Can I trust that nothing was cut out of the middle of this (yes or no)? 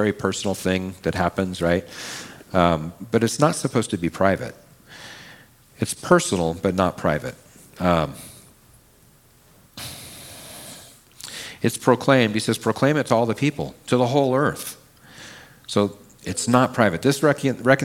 yes